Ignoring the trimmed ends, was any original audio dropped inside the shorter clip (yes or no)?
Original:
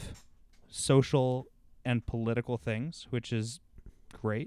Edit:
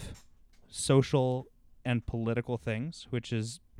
no